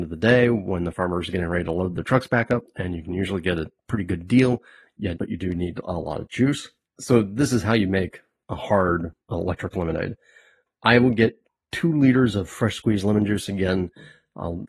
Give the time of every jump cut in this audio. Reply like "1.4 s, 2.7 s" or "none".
5.2 s, 6.9 s